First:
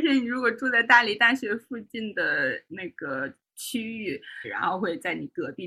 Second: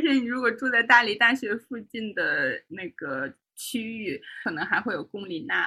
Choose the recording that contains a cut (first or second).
first